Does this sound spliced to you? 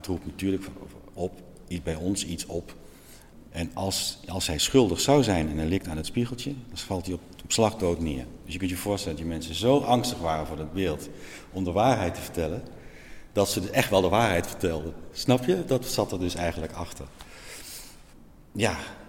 yes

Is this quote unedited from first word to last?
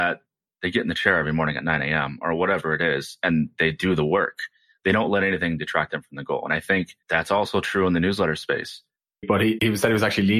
no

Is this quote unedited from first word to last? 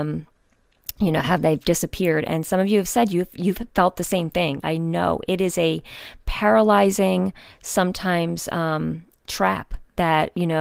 no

